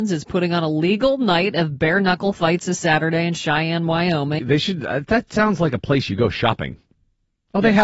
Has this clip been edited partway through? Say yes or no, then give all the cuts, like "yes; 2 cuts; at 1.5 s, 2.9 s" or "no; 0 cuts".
yes; 1 cut; at 4.4 s